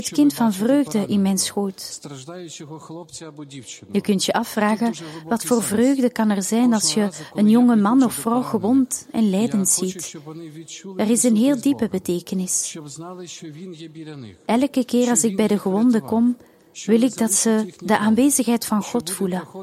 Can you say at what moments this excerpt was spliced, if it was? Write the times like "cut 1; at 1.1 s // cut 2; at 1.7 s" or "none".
none